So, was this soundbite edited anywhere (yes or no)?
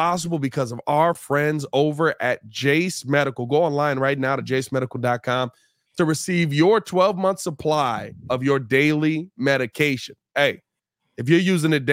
no